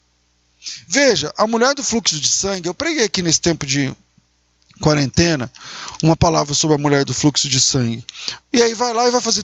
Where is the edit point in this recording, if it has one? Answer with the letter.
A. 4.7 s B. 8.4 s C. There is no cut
B